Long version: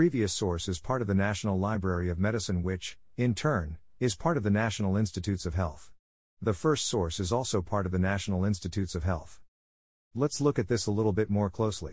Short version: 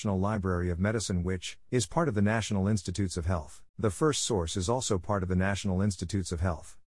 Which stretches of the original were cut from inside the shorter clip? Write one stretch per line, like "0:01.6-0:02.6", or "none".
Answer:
0:03.1-0:04.0
0:06.0-0:06.3